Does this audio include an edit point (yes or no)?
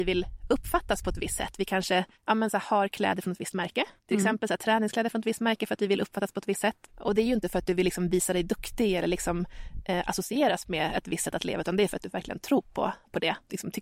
yes